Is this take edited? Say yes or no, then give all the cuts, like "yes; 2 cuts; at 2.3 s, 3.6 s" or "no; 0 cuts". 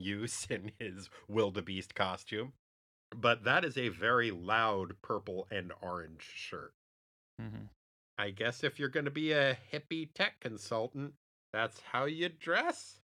no; 0 cuts